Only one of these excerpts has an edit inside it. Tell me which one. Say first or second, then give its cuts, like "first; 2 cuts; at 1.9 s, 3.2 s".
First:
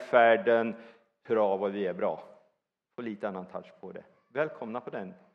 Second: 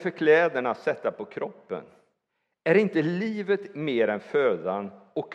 first; 1 cut; at 1.3 s